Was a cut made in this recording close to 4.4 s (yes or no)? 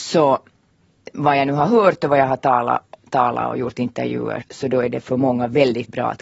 yes